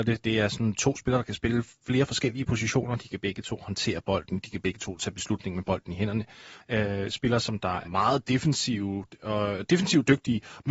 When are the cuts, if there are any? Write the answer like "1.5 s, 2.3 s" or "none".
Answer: 6.6 s, 7.8 s